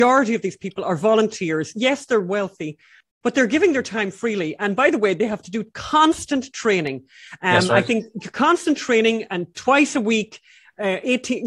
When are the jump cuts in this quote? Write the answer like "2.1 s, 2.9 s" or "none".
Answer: none